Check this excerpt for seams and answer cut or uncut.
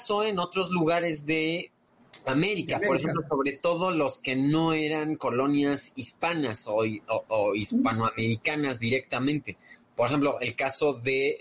uncut